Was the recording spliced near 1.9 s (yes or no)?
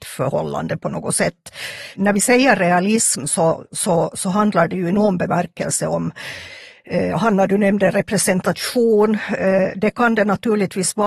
no